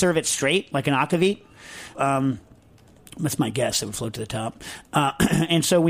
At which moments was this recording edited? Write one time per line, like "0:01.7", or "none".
0:01.9